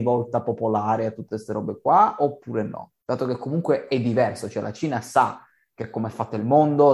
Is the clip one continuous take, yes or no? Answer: yes